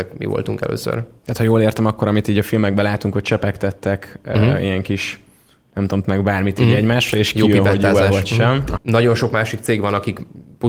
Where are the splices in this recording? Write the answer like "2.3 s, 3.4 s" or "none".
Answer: 6.0 s, 8.8 s